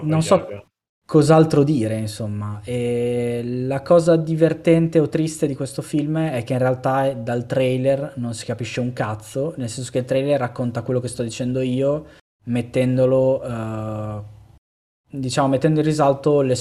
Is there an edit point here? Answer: yes; 1 cut; at 15.0 s

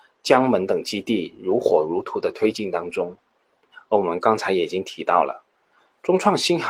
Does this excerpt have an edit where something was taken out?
no; 0 cuts

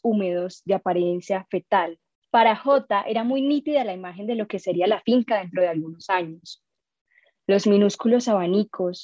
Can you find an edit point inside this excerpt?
yes; 1 cut; at 2.2 s

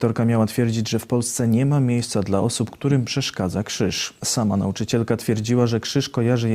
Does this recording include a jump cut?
yes; 1 cut; at 4.2 s

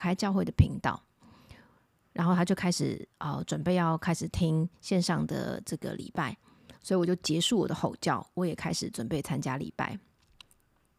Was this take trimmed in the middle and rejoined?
no; 0 cuts

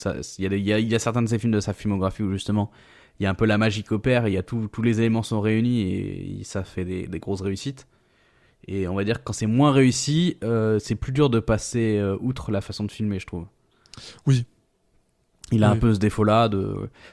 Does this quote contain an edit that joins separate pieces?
no; 0 cuts

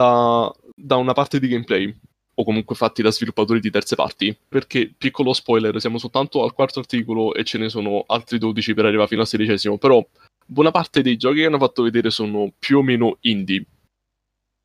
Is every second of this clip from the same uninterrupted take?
no; 2 cuts; at 2.1 s, 4.5 s

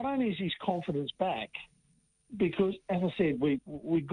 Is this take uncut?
yes; 0 cuts

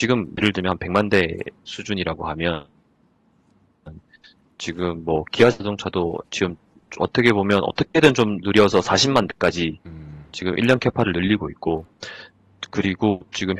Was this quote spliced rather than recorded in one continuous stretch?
no; 0 cuts

